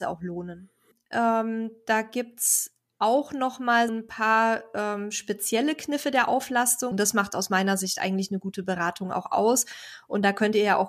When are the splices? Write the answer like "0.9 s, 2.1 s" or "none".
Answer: 0.9 s, 3.9 s, 6.9 s